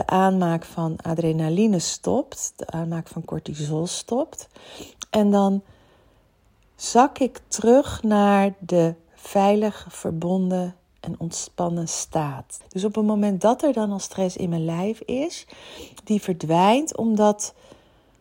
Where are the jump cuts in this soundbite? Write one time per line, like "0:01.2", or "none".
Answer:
0:12.6

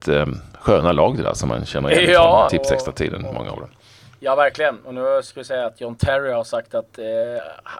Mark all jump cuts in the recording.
0:02.5

